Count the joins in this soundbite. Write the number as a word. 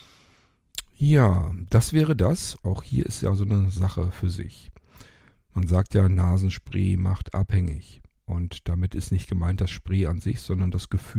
one